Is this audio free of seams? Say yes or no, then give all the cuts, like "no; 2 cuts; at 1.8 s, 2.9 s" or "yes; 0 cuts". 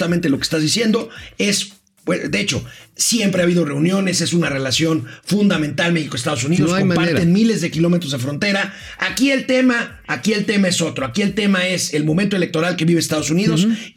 yes; 0 cuts